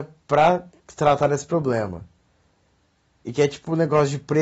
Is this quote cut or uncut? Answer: uncut